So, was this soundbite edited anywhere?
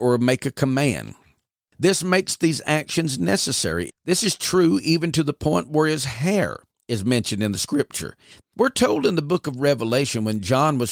yes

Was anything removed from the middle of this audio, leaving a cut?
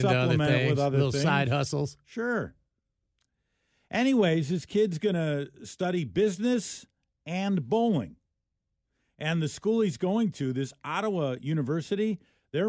no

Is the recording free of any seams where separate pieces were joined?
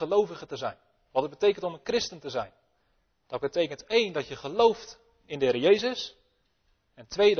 yes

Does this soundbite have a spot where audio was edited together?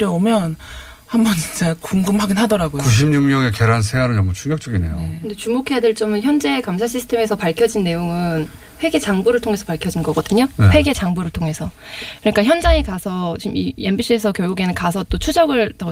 no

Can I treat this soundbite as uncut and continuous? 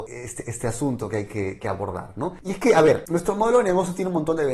no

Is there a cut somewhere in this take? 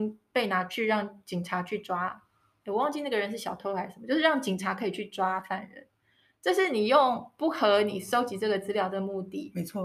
no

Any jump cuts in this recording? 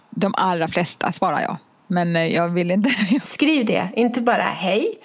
yes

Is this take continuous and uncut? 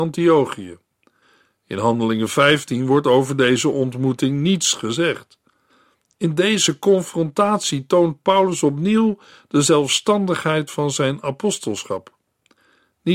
yes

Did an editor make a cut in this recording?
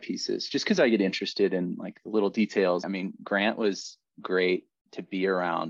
yes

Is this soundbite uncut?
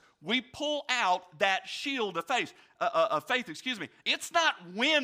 no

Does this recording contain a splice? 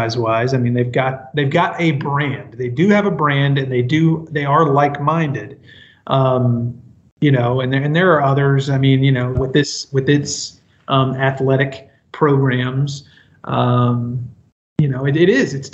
yes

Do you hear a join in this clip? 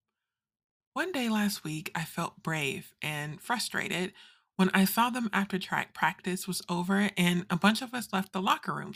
no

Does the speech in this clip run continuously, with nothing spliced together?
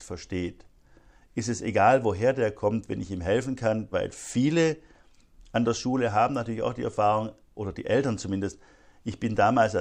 no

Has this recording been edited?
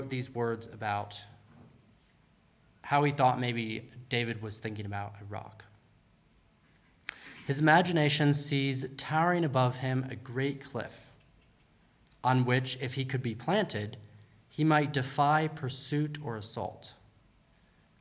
no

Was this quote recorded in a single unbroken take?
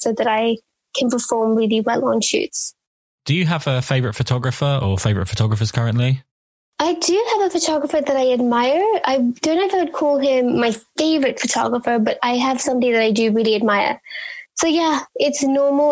no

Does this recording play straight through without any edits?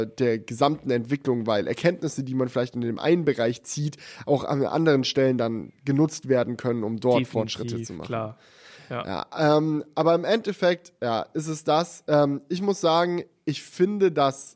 yes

